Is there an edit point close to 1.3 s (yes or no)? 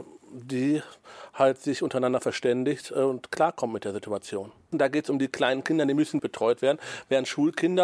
no